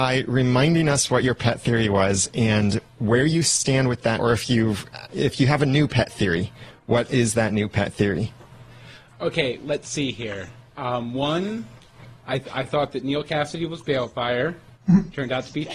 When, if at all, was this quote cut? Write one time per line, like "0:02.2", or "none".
0:04.2
0:09.6

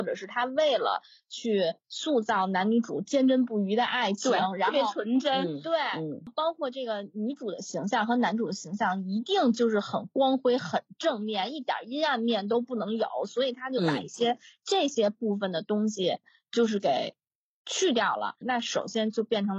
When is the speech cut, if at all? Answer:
0:18.4

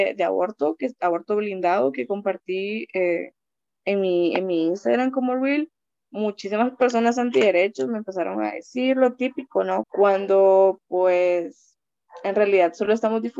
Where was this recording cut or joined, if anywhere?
0:09.8

